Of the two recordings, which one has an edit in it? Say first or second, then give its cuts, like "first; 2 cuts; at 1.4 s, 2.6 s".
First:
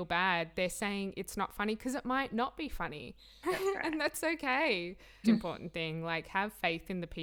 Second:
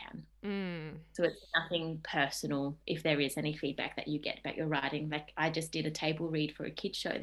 first; 2 cuts; at 3.4 s, 5.2 s